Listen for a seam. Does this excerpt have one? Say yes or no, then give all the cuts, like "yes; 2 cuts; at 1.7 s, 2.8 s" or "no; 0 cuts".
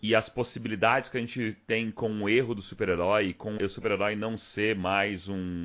yes; 1 cut; at 3.6 s